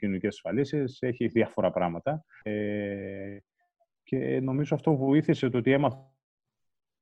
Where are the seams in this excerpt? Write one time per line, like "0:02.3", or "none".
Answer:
0:02.4